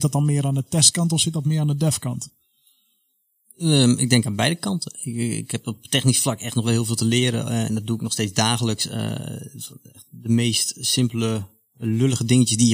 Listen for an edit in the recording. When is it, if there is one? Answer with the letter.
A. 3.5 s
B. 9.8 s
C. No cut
C